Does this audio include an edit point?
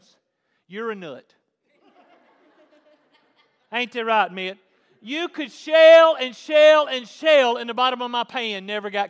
no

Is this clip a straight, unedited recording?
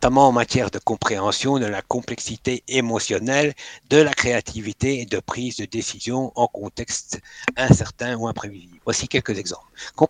no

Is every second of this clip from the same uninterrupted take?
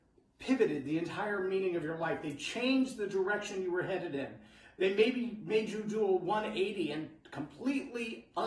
yes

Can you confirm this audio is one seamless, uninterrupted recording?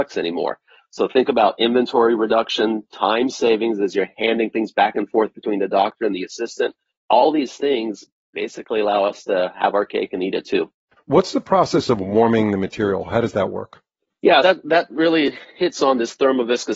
no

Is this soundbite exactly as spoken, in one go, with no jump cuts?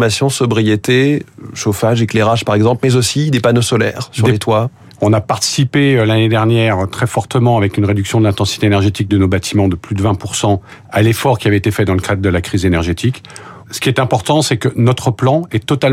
no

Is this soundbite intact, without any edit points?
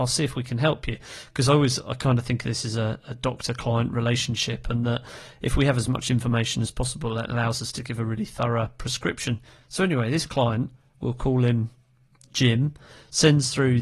yes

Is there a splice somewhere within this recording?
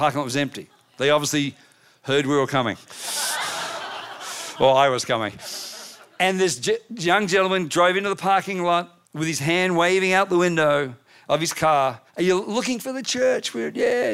yes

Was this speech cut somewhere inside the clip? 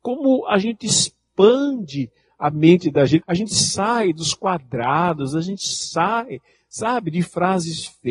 yes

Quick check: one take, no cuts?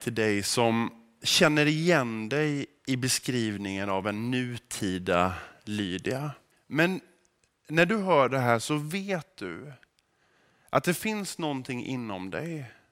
no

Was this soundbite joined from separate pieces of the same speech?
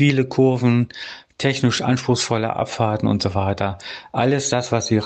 no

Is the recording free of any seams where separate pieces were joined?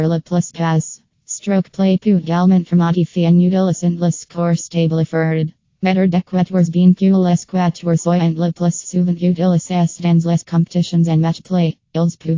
no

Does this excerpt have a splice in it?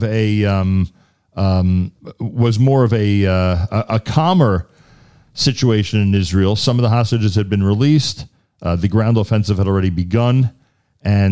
no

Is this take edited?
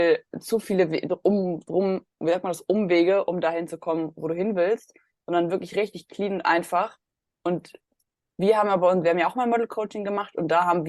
no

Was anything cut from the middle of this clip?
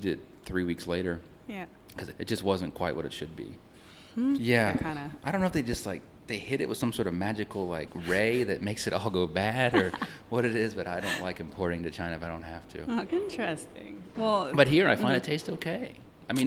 yes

